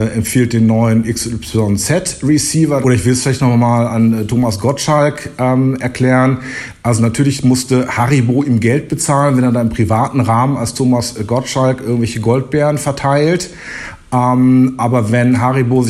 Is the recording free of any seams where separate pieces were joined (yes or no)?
no